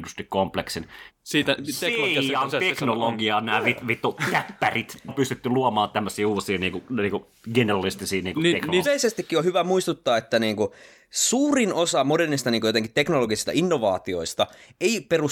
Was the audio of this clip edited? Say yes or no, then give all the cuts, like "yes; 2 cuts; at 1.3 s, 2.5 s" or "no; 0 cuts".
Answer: yes; 3 cuts; at 1.1 s, 5.1 s, 8.8 s